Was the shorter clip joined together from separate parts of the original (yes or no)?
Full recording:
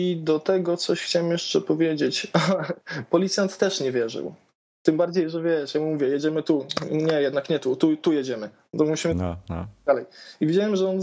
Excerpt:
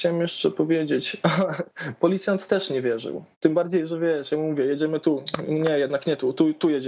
yes